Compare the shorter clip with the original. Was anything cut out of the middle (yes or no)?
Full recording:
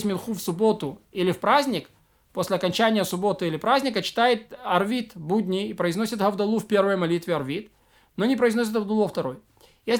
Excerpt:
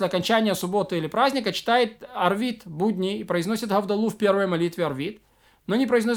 no